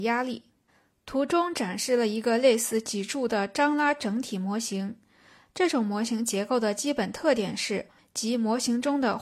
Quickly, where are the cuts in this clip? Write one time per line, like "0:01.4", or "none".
0:08.0

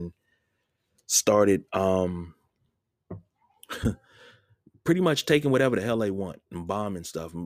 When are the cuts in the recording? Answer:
none

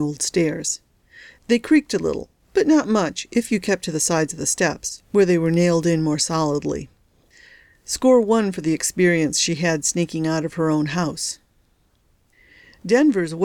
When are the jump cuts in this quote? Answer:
none

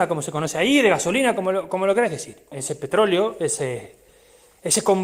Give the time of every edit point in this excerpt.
0:02.5

